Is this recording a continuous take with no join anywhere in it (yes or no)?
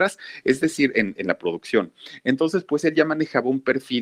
yes